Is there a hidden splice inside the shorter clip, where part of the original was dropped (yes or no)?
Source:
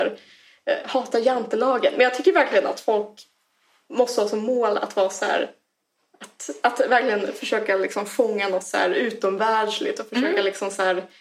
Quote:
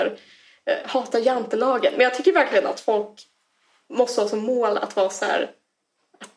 no